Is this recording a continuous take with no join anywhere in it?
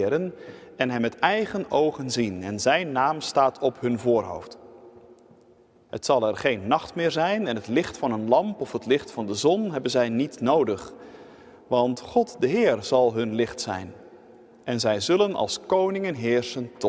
yes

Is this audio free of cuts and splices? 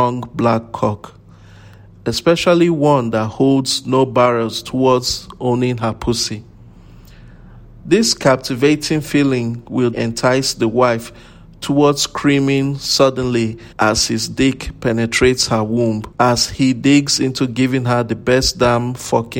no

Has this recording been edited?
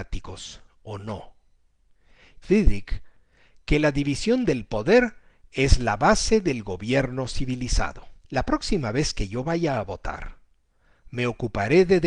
yes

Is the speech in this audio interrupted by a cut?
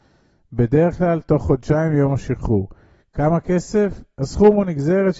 no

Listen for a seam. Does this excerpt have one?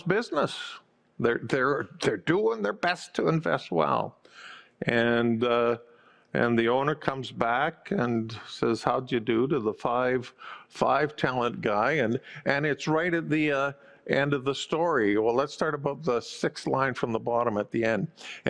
no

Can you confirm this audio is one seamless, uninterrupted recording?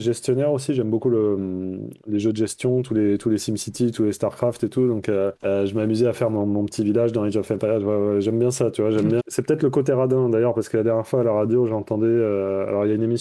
no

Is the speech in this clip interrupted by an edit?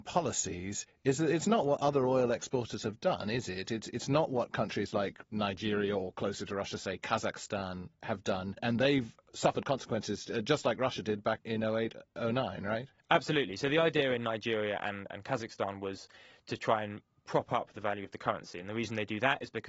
no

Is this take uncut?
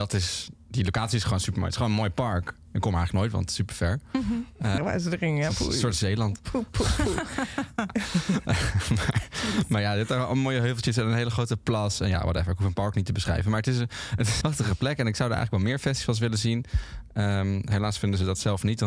no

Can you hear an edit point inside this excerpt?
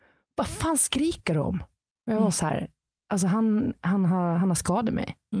no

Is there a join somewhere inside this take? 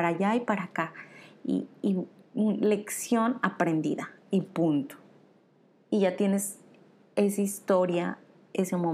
no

